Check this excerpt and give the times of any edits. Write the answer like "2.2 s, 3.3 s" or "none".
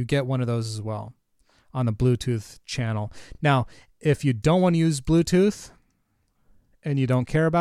none